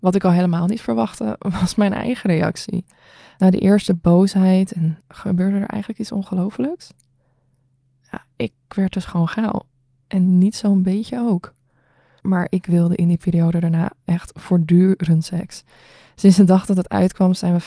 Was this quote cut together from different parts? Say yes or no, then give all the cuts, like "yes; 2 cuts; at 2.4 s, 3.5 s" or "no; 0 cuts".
yes; 2 cuts; at 5.0 s, 12.2 s